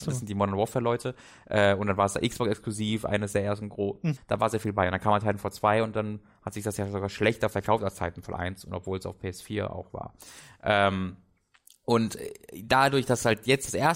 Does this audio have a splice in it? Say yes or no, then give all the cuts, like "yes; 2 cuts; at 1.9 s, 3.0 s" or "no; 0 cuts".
yes; 1 cut; at 4.2 s